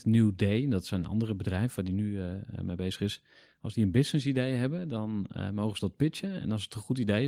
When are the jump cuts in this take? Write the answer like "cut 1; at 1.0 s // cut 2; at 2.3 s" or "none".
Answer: none